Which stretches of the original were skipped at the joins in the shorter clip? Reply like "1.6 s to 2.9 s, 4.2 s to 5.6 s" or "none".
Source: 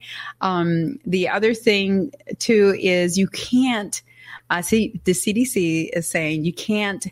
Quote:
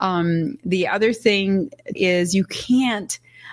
2.4 s to 2.8 s